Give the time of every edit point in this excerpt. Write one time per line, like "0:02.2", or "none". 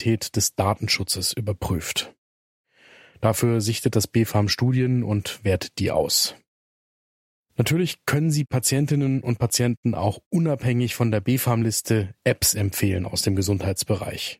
none